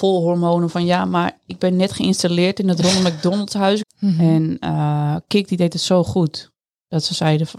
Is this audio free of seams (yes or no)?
no